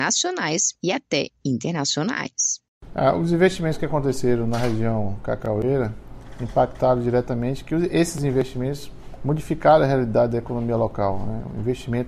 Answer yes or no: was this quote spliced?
no